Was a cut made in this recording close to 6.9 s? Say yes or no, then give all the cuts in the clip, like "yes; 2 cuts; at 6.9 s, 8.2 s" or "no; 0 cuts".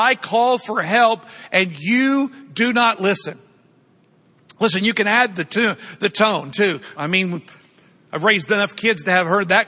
yes; 1 cut; at 6.9 s